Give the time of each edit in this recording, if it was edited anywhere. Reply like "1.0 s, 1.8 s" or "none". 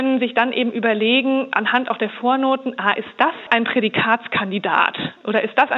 none